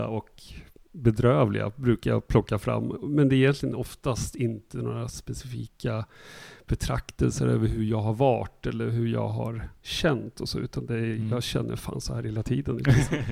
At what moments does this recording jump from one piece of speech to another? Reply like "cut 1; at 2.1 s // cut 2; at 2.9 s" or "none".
none